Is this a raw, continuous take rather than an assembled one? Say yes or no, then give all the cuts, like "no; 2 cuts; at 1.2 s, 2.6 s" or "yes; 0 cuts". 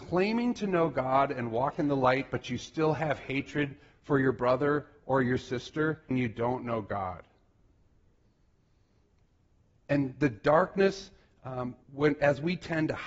no; 2 cuts; at 6.1 s, 11.8 s